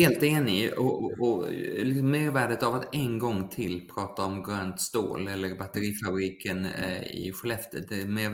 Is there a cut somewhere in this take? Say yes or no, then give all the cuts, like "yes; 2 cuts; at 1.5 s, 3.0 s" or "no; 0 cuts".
no; 0 cuts